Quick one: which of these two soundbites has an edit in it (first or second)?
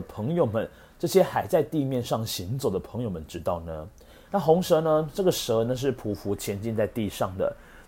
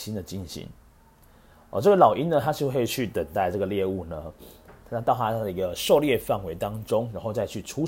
first